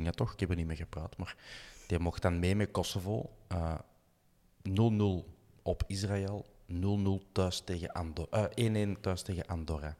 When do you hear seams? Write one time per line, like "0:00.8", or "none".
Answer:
none